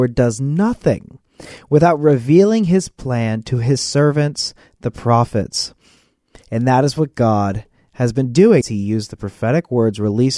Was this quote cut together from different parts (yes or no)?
yes